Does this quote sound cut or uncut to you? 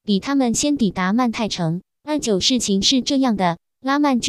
cut